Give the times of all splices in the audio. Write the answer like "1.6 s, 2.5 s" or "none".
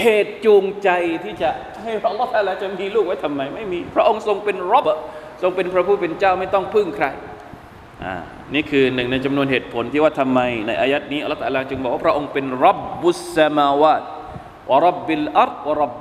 4.8 s